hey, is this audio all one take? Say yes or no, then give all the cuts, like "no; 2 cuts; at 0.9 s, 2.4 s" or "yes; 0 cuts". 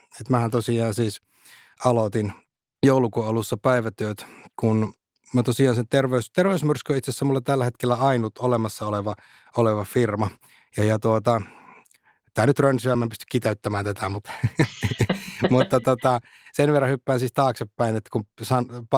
yes; 0 cuts